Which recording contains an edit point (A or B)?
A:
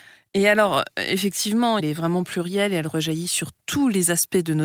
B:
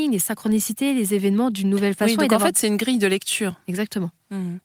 A